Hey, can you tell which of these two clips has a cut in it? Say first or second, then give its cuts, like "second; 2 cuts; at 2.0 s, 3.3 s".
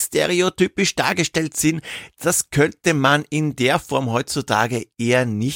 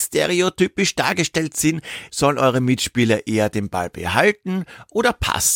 second; 1 cut; at 2.1 s